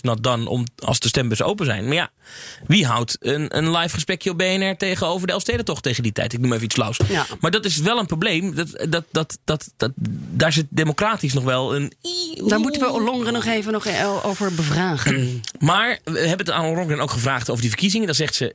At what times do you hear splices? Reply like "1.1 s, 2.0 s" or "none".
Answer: none